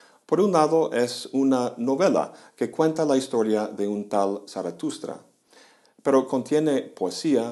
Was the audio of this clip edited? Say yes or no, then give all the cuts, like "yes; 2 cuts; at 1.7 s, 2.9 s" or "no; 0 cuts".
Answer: no; 0 cuts